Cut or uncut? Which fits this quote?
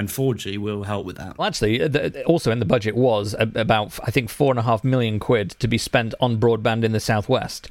cut